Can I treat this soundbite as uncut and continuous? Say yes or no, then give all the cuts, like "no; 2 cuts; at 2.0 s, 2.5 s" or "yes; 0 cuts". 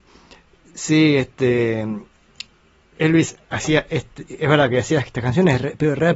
yes; 0 cuts